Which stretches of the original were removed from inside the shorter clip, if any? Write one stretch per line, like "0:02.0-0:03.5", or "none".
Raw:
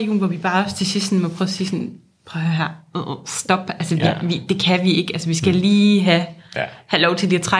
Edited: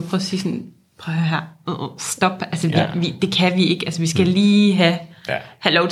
none